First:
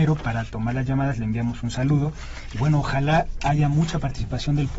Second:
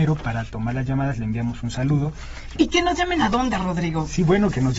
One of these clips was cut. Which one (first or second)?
second